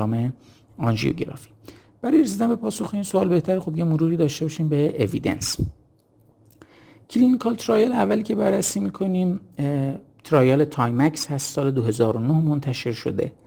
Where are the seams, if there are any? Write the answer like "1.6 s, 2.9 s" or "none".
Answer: none